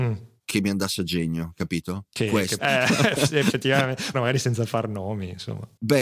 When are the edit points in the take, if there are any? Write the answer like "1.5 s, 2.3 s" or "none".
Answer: 2.6 s, 4.1 s